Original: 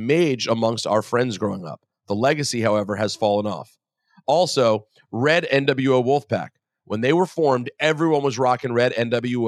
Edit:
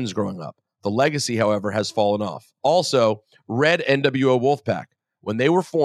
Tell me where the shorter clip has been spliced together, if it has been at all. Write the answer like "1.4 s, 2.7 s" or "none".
2.6 s